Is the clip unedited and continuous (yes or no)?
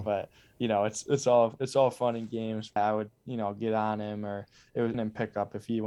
no